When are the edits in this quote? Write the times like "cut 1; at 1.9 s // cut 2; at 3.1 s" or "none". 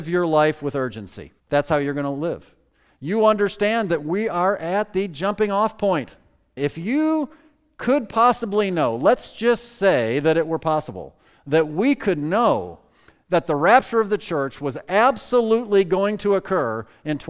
cut 1; at 1.4 s // cut 2; at 6.6 s